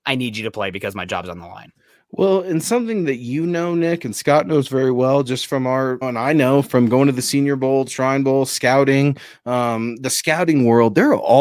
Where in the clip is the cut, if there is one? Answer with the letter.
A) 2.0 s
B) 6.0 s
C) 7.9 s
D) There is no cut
B